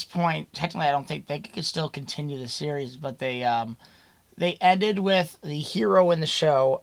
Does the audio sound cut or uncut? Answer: uncut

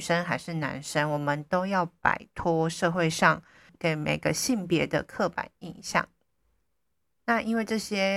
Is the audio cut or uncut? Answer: cut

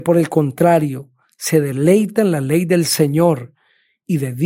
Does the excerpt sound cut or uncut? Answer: uncut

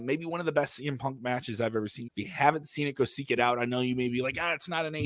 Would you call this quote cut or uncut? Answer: cut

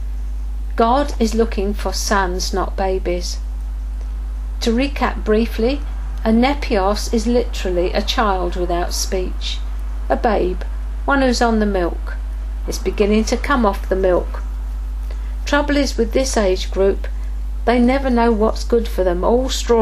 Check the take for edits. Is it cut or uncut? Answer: cut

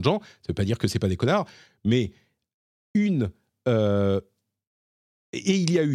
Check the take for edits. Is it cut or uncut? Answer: uncut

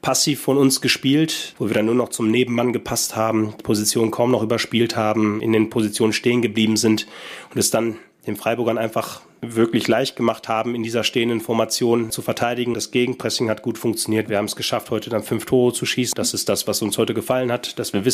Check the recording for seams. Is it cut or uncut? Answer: cut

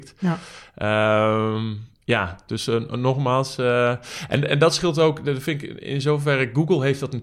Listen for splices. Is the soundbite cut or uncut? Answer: uncut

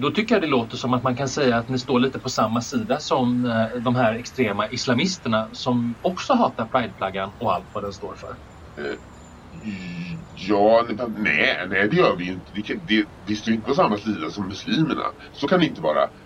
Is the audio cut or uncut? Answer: uncut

